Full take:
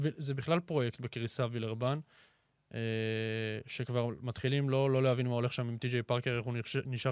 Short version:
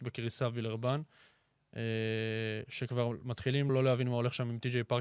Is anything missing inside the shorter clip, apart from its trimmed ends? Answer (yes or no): yes